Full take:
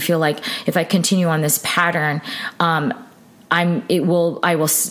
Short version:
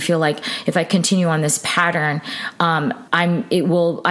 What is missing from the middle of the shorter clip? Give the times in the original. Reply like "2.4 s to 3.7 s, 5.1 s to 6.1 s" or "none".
3.1 s to 3.5 s

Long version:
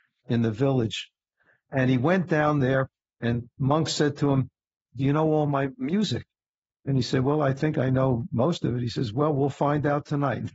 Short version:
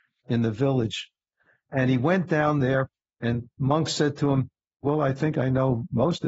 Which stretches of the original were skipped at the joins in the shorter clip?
4.8 s to 7.2 s

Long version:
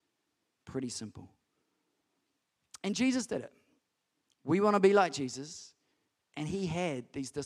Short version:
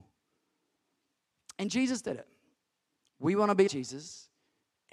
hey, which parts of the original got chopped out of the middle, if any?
4.9 s to 5.1 s

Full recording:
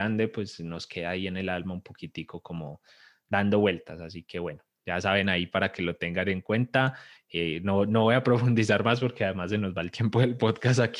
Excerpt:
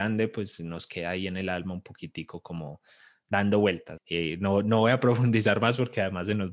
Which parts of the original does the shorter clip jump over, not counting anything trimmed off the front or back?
4.0 s to 7.2 s

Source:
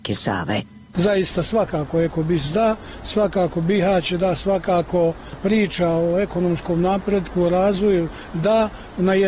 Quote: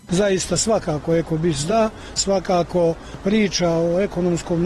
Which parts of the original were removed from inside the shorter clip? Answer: 3.0 s to 4.4 s

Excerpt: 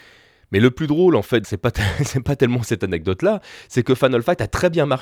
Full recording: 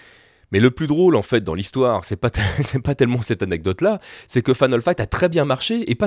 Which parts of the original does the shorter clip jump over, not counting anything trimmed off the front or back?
1.4 s to 2.0 s

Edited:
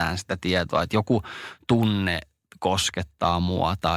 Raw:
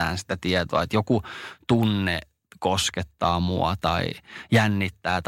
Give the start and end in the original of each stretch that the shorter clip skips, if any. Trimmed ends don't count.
none

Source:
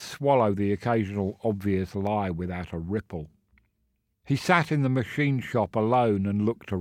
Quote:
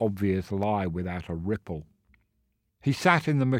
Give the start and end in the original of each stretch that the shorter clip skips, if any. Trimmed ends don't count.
none

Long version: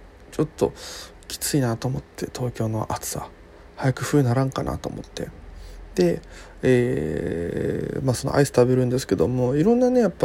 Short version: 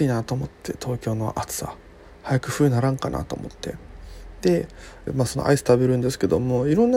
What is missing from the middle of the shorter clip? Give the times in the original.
6.6 s to 8.0 s

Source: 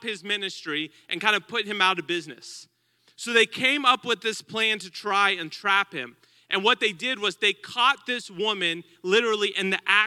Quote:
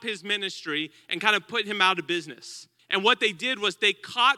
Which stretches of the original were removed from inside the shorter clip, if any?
2.8 s to 6.4 s

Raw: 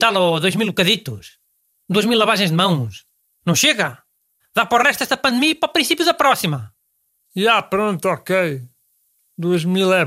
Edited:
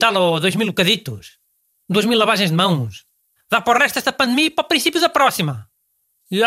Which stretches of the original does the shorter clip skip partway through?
3.3 s to 4.4 s

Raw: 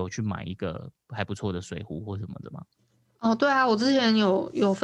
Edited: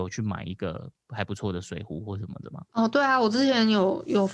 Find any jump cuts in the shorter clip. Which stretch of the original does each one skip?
2.7 s to 3.2 s

